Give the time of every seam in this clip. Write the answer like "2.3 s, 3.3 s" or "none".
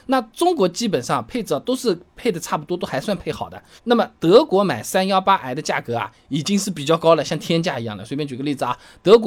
3.8 s